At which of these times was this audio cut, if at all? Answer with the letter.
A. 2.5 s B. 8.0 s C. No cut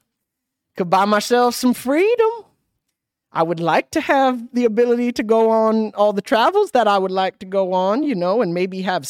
C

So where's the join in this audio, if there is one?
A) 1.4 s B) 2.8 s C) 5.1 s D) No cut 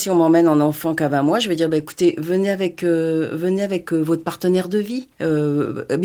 C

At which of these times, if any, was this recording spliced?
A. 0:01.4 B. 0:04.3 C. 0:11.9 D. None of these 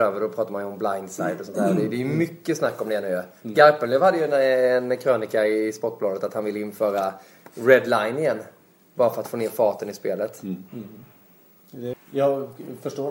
C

